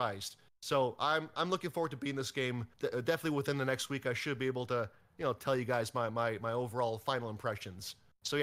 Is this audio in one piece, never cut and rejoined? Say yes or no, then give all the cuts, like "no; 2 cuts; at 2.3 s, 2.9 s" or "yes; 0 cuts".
no; 1 cut; at 2.7 s